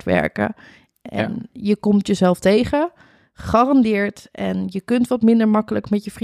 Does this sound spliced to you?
no; 0 cuts

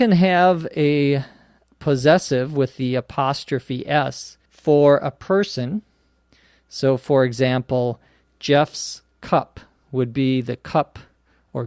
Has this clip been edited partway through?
yes; 1 cut; at 4.5 s

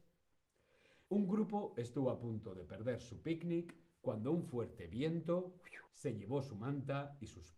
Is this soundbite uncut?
no; 2 cuts; at 1.1 s, 5.9 s

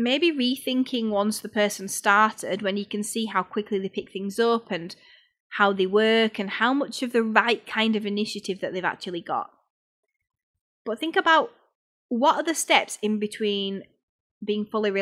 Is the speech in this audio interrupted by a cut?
no; 0 cuts

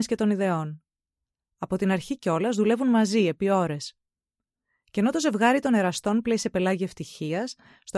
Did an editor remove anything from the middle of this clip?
no; 0 cuts

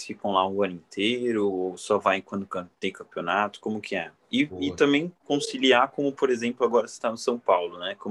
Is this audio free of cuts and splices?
yes; 0 cuts

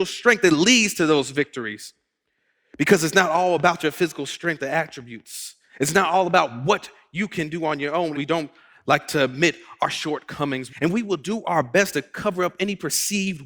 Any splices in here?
yes; 2 cuts; at 8.1 s, 10.7 s

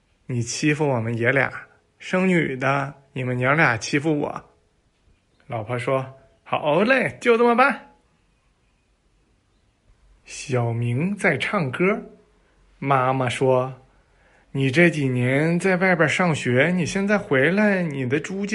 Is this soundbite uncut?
yes; 0 cuts

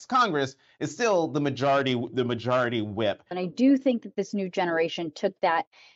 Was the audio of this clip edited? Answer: yes; 1 cut; at 3.3 s

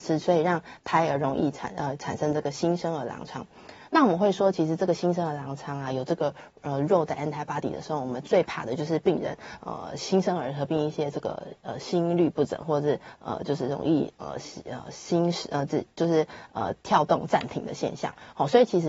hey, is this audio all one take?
yes; 0 cuts

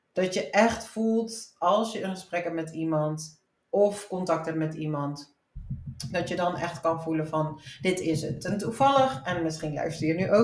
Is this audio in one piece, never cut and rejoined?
yes; 0 cuts

